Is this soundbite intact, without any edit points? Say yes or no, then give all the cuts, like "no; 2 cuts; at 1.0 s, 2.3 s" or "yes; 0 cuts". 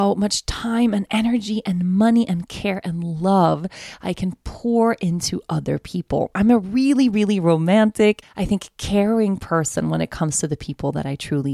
no; 1 cut; at 8.2 s